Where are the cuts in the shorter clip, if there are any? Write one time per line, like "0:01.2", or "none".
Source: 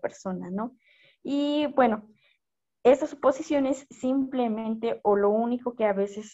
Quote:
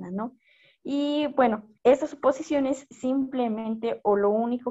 0:01.8